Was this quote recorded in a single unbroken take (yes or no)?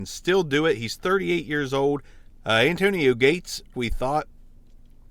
no